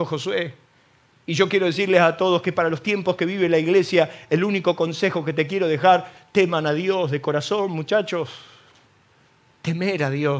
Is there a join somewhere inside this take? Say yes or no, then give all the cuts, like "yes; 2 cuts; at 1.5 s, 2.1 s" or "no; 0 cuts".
no; 0 cuts